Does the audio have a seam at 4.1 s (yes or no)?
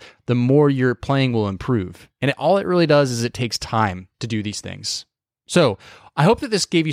yes